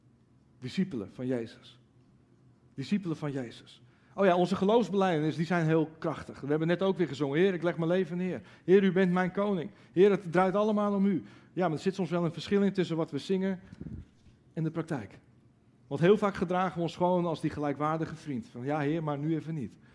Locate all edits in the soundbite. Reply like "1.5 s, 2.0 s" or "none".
none

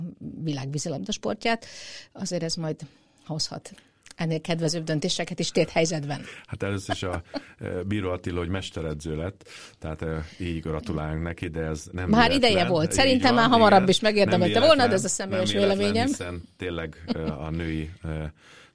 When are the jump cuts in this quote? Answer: none

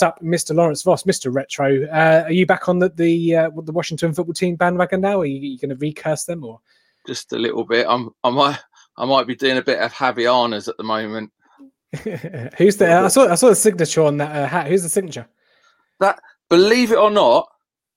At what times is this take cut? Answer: 7.3 s

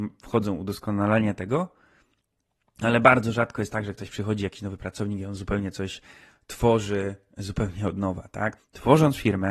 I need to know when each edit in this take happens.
8.6 s

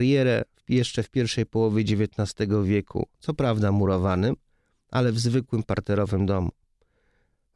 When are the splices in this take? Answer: 3.1 s

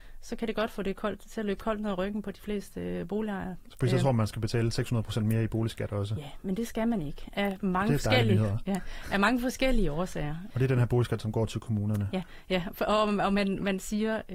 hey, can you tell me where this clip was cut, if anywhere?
10.5 s

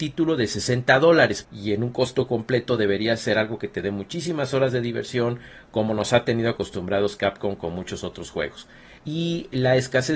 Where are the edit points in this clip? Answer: 1.4 s, 9.0 s

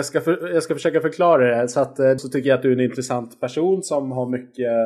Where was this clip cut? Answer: 2.2 s

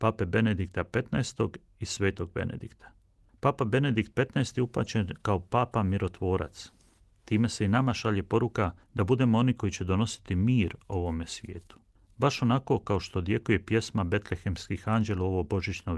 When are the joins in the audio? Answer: none

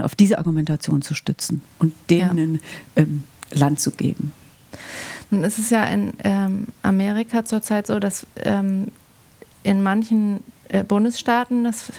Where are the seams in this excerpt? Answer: none

